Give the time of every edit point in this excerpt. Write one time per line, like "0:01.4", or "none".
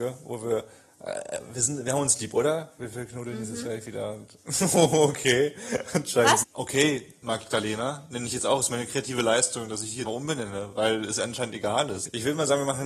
0:06.4
0:10.1